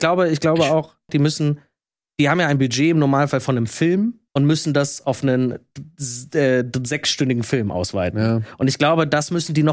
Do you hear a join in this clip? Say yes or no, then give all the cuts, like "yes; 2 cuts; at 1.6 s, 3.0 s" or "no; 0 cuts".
yes; 2 cuts; at 1.1 s, 4.3 s